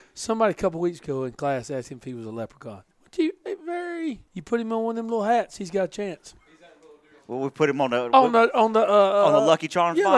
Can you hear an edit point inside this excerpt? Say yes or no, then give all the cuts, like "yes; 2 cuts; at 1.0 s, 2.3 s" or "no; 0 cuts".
yes; 2 cuts; at 2.9 s, 4.3 s